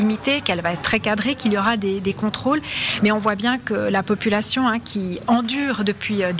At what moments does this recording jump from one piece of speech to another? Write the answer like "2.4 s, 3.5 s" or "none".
none